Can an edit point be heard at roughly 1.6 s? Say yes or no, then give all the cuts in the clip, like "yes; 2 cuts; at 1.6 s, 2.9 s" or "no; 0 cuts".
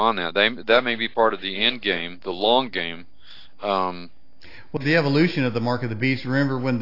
no; 1 cut; at 4.8 s